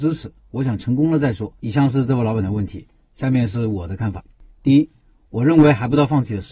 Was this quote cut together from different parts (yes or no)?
yes